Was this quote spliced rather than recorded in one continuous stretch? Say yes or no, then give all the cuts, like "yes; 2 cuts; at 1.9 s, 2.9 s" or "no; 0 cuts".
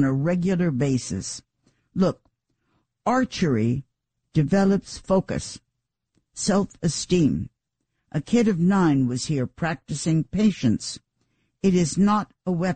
no; 0 cuts